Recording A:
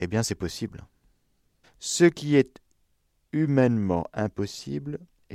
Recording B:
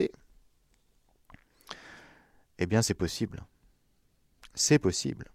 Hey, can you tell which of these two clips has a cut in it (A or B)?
A